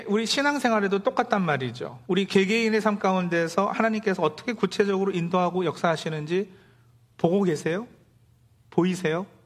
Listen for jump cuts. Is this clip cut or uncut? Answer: uncut